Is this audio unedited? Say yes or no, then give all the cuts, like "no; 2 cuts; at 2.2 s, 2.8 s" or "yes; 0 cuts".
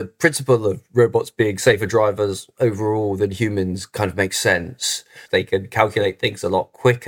no; 1 cut; at 5.3 s